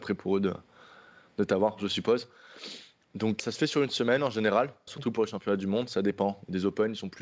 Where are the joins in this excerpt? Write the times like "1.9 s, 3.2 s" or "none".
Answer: 3.4 s, 4.9 s